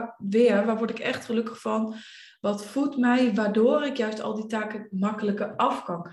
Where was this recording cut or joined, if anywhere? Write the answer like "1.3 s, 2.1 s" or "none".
none